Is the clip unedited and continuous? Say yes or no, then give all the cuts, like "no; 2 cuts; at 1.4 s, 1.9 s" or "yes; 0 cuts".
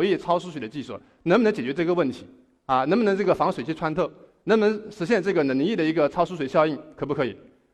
yes; 0 cuts